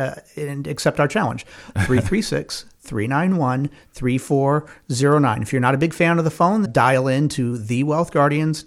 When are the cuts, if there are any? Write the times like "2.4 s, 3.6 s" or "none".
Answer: 6.7 s